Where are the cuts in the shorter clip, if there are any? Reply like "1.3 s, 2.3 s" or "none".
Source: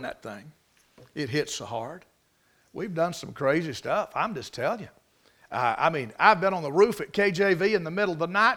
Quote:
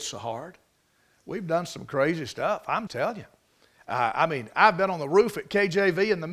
2.9 s